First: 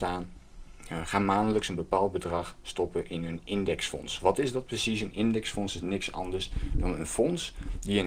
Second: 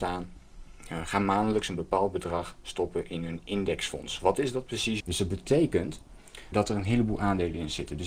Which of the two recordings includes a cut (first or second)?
second